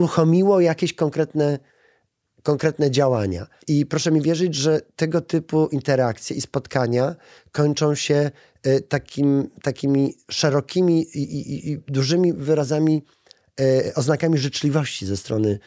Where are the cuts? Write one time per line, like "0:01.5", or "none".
0:03.6